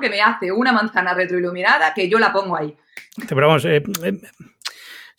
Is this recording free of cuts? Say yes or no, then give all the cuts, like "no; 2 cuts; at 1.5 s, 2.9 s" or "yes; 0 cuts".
no; 1 cut; at 3.3 s